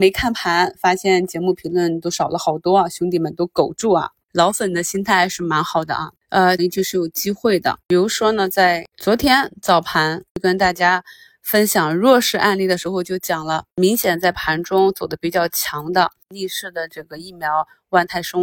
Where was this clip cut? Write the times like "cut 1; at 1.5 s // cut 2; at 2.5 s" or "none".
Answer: cut 1; at 6.6 s